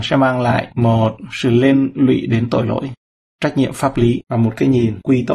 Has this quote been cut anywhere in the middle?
no; 0 cuts

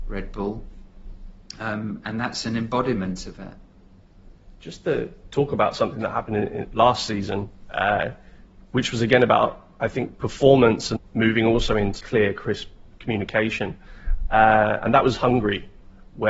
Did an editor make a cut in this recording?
yes; 2 cuts; at 11.0 s, 12.0 s

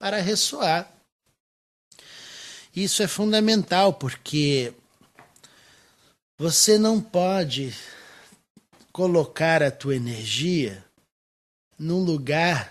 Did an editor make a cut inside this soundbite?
yes; 1 cut; at 11.7 s

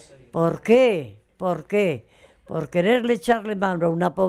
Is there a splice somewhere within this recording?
no; 0 cuts

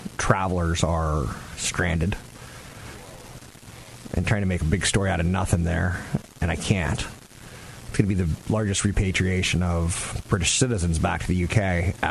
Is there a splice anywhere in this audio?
no; 0 cuts

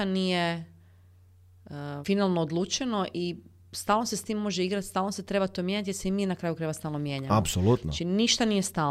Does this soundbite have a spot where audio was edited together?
yes; 1 cut; at 2.0 s

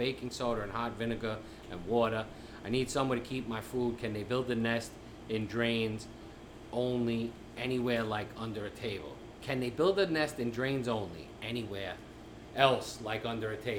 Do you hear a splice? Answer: no; 0 cuts

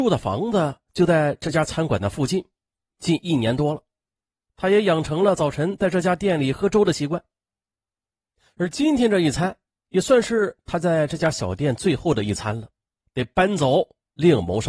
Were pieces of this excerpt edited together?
yes; 1 cut; at 13.0 s

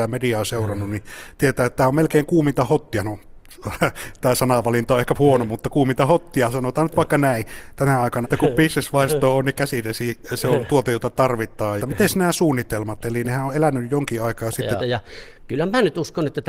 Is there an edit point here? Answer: yes; 3 cuts; at 8.2 s, 11.8 s, 14.8 s

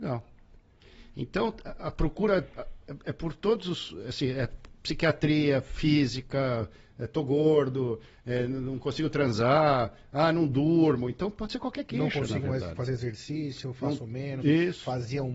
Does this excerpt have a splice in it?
no; 0 cuts

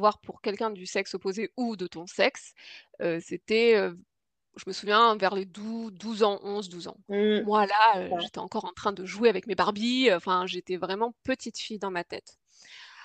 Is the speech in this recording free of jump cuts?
yes; 0 cuts

